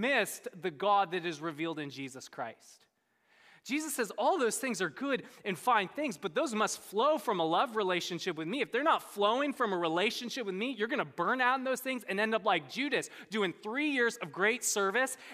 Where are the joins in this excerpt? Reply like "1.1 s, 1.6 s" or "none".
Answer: none